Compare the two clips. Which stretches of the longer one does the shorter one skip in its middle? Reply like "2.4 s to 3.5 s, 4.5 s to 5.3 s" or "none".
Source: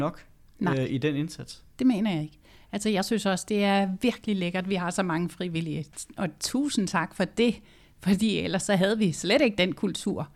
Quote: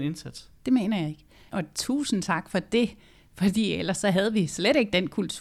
2.6 s to 6.1 s

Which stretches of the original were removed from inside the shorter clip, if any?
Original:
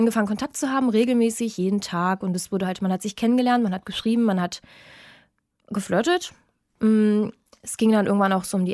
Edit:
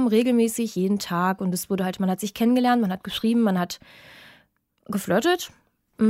none

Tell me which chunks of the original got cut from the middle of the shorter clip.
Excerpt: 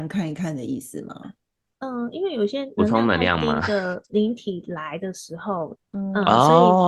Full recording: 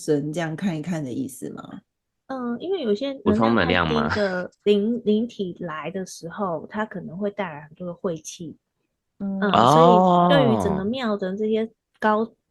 4.6 s to 5.0 s, 6.7 s to 9.0 s

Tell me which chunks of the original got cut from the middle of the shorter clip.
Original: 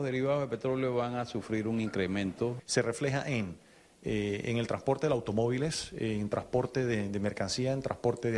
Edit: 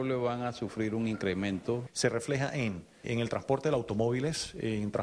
3.8 s to 4.4 s

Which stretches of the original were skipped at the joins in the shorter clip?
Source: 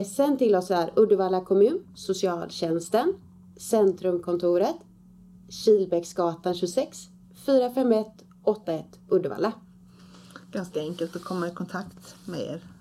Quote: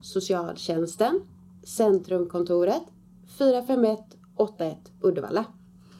5.2 s to 7.3 s

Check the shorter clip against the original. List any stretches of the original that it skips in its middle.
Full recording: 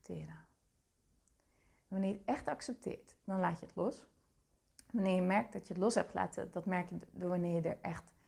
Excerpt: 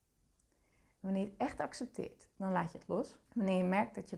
4.1 s to 4.8 s

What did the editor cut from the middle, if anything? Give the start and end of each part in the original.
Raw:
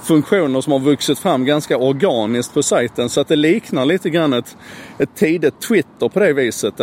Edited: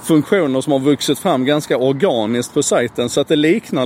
none

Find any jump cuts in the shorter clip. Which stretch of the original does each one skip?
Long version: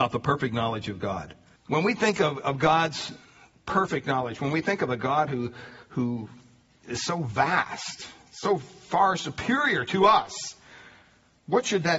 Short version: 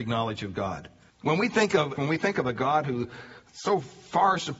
2.4 s to 4.4 s, 5.9 s to 8.2 s

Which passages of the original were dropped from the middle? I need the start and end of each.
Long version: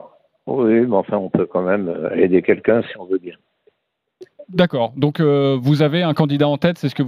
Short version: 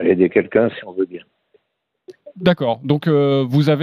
none

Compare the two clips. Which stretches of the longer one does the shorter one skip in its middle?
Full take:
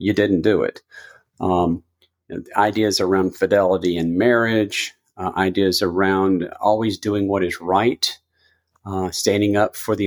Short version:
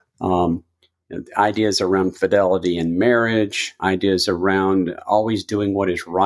5.0 s to 5.3 s

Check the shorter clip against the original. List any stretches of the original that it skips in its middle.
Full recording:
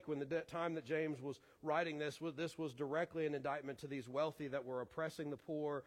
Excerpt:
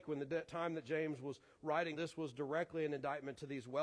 1.9 s to 2.3 s

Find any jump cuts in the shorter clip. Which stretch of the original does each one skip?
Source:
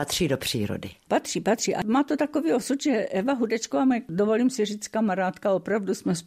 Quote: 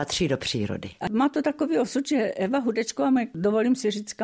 1.0 s to 1.8 s

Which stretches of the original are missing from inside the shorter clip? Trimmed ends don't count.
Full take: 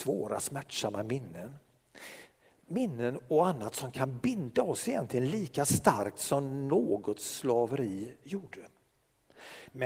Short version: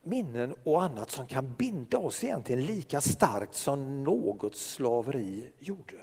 none

